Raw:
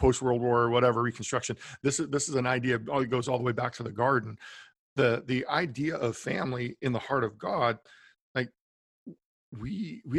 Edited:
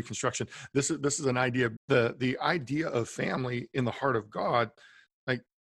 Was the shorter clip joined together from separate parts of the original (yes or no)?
yes